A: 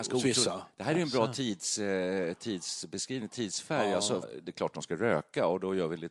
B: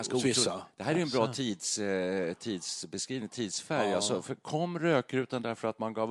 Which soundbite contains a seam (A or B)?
A